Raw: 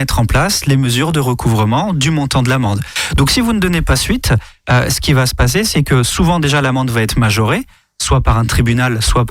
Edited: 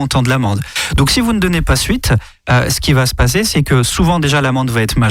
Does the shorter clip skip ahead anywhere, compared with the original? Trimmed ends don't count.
no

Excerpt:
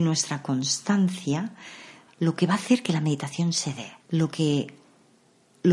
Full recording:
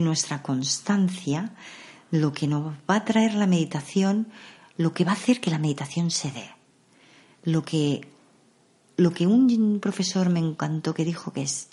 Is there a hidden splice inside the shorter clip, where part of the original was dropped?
yes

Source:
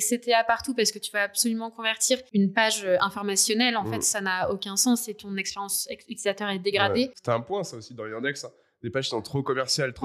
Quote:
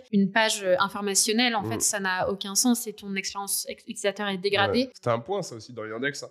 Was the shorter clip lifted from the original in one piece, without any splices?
yes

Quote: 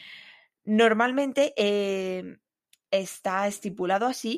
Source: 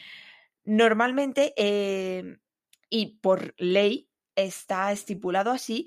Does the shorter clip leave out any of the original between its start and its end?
yes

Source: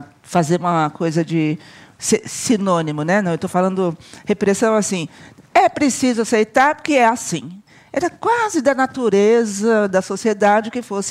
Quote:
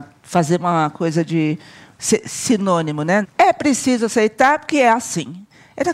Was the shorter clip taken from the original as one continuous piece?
no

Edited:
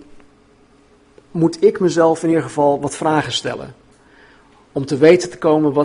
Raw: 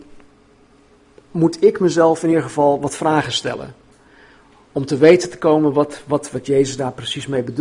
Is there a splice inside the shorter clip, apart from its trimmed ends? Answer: no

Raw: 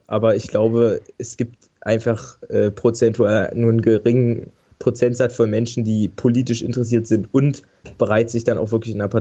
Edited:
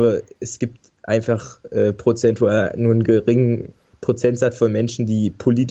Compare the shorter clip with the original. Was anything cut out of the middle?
no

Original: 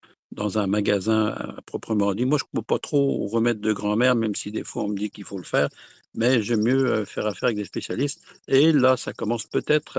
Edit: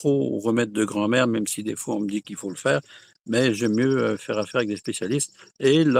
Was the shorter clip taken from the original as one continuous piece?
yes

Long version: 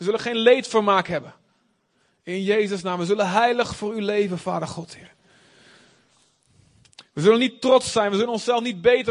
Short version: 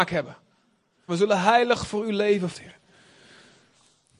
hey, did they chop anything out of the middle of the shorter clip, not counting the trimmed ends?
yes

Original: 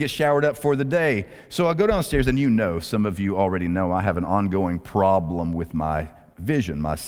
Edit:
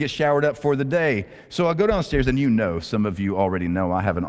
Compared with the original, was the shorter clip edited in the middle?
no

